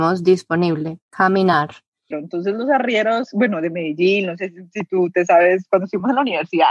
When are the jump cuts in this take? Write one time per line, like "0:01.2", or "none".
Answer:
0:02.1

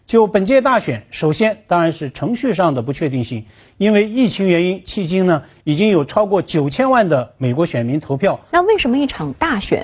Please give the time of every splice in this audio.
0:08.5

